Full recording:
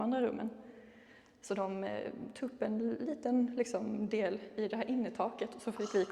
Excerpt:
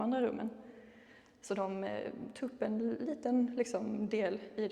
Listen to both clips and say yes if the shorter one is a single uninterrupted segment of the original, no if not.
yes